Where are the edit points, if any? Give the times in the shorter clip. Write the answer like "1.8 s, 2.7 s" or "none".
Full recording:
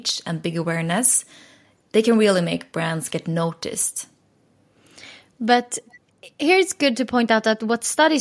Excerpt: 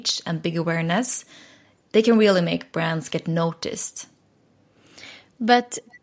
none